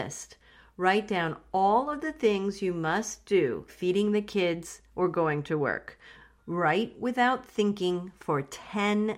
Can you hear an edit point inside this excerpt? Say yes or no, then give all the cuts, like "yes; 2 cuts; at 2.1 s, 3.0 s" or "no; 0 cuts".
yes; 2 cuts; at 3.7 s, 6.4 s